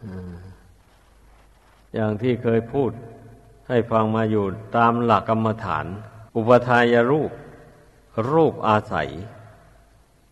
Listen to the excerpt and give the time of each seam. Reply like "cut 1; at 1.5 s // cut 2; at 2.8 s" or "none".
cut 1; at 5.2 s // cut 2; at 6.3 s

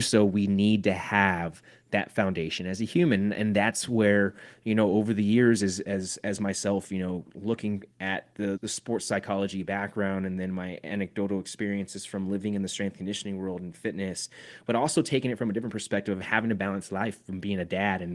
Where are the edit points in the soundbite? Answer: cut 1; at 8.6 s

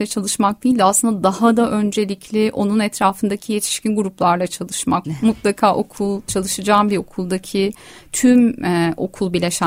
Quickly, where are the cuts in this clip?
cut 1; at 5.0 s

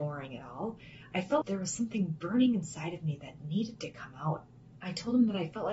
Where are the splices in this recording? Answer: cut 1; at 1.4 s

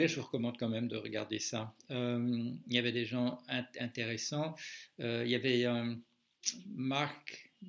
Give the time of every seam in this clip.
none

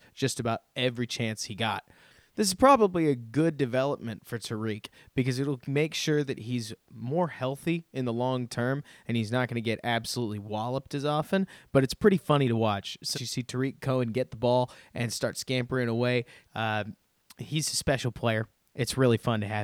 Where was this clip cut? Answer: cut 1; at 13.1 s // cut 2; at 16.5 s

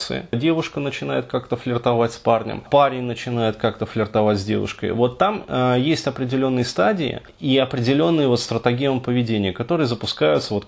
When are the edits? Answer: none

